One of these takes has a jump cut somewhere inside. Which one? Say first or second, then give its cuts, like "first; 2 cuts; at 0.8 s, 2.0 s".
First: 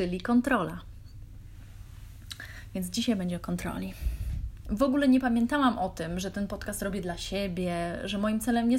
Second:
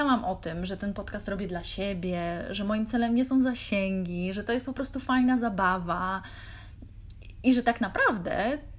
first; 1 cut; at 4.6 s